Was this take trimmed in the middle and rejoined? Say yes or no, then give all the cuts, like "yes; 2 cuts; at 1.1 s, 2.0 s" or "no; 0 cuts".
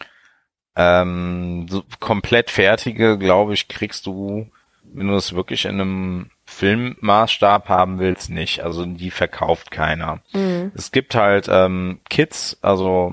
no; 0 cuts